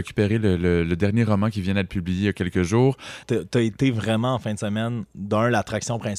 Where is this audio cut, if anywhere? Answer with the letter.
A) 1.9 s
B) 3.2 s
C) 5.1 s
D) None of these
B